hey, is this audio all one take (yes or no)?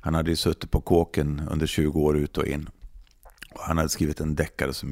yes